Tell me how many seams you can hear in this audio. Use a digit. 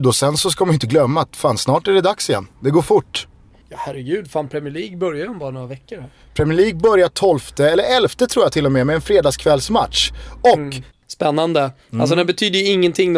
1